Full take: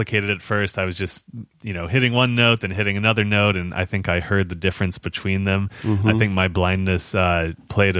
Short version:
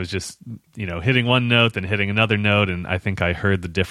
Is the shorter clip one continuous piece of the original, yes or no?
yes